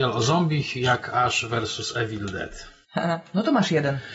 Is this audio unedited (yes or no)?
yes